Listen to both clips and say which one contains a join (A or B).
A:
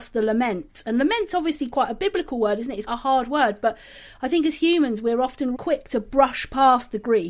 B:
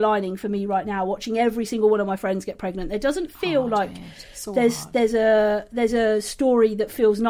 A